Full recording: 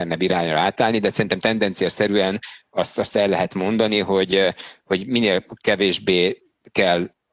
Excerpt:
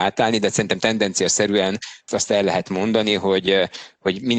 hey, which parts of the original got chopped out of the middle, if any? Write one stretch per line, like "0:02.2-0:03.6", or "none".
0:02.7-0:02.9